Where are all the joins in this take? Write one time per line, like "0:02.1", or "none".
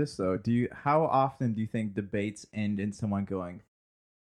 none